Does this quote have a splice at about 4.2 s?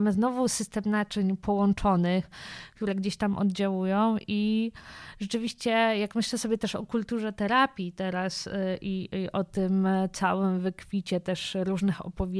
no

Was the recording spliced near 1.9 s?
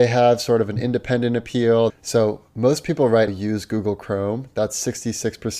yes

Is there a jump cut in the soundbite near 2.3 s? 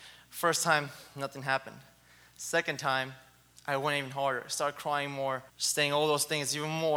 no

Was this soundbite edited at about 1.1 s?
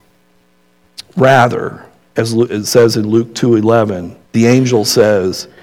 yes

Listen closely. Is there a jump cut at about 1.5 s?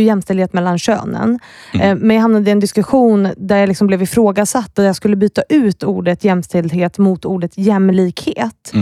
no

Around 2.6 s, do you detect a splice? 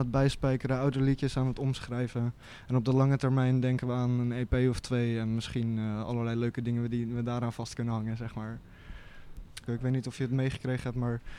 no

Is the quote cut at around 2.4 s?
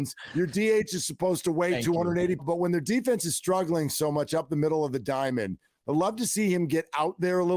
yes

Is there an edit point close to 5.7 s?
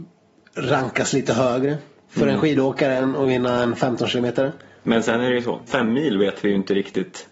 yes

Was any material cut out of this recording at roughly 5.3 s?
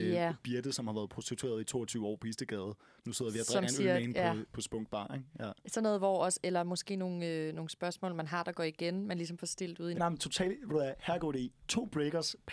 no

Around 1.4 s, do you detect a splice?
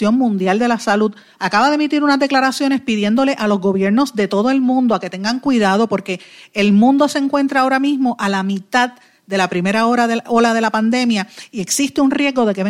yes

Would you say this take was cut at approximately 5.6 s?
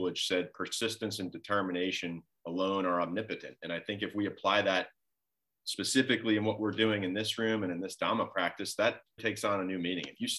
no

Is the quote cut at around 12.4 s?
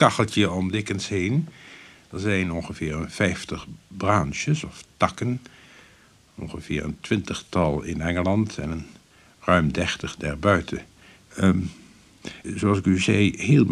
yes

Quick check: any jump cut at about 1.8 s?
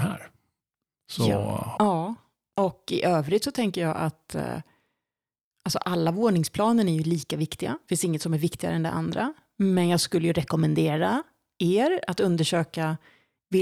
yes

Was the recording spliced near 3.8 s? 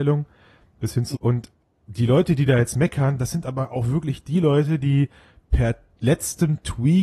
no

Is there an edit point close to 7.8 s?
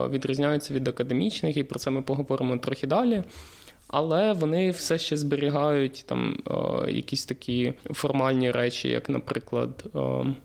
yes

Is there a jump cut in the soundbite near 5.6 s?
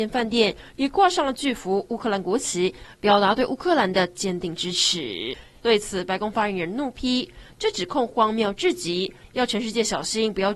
yes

